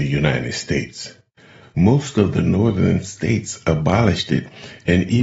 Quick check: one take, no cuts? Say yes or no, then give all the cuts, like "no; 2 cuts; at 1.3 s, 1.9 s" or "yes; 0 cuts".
no; 1 cut; at 1.6 s